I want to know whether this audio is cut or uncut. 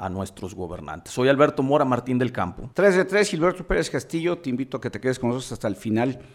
cut